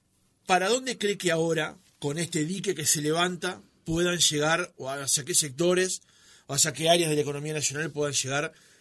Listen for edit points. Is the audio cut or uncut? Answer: uncut